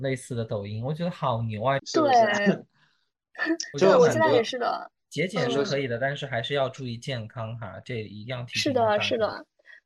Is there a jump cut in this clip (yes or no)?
yes